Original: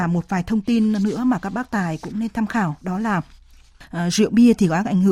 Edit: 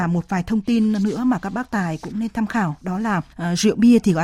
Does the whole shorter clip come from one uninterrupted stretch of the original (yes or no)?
no